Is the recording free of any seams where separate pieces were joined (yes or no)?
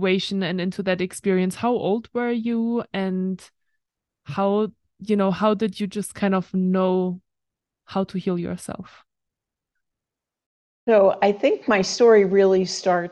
yes